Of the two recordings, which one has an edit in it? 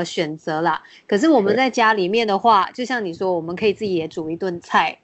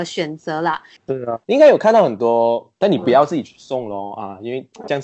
second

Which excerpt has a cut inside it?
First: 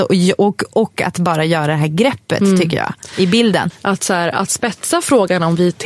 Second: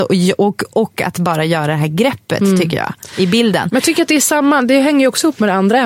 first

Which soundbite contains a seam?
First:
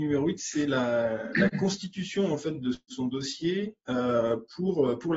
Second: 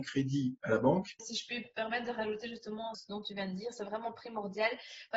second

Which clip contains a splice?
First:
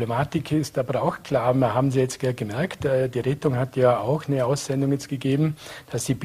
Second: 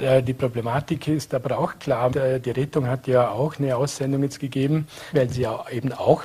second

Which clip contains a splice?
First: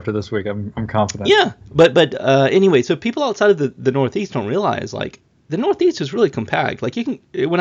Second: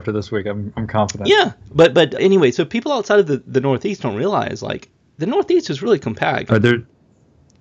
second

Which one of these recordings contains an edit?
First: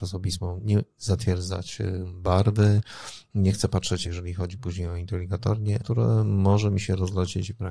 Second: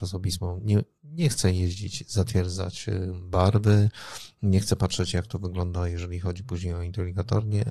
first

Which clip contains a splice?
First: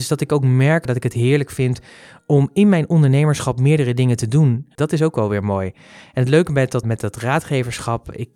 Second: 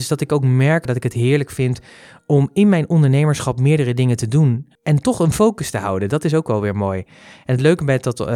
first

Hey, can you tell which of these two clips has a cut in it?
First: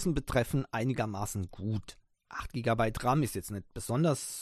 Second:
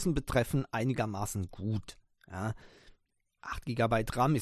first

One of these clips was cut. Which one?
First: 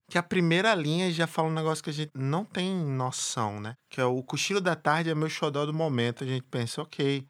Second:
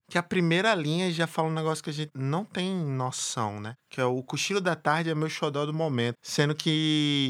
second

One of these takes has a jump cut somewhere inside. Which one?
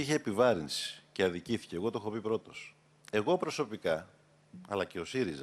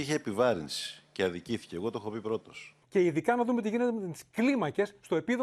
second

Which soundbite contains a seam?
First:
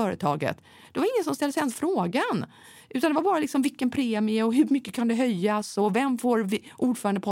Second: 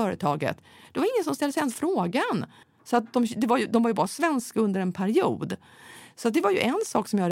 second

